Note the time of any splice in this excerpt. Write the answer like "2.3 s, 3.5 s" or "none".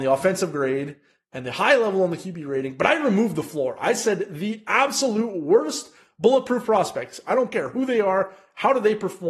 none